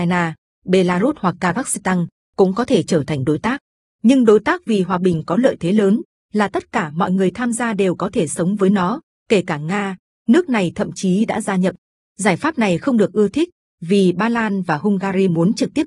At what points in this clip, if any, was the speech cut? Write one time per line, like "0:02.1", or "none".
0:03.9
0:12.0